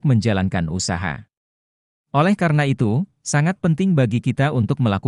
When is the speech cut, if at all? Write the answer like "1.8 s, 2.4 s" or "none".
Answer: 2.0 s